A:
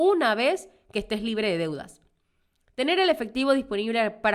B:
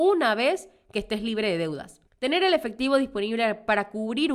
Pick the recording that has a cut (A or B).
B